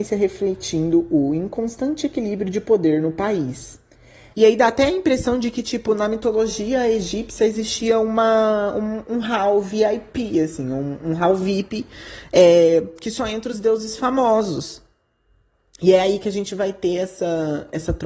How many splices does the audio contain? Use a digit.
1